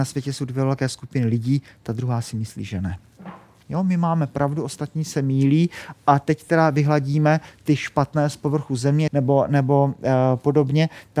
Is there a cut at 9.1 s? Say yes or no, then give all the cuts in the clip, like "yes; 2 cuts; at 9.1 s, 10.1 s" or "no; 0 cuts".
yes; 2 cuts; at 3.6 s, 9.1 s